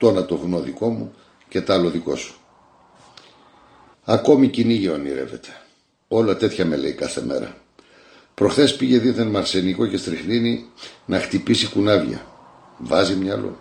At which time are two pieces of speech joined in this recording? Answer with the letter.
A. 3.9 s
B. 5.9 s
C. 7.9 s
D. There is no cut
A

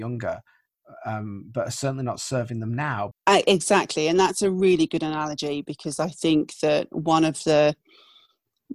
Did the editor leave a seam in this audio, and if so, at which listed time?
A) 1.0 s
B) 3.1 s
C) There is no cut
B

